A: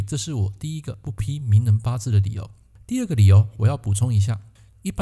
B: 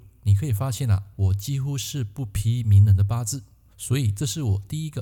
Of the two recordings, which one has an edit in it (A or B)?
B